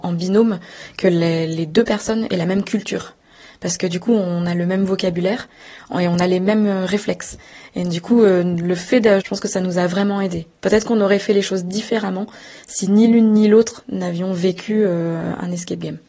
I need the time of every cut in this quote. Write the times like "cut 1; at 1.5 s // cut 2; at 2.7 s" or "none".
cut 1; at 9.2 s